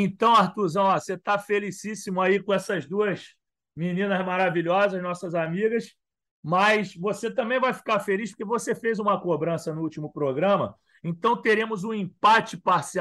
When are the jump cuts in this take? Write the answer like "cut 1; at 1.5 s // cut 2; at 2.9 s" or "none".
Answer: none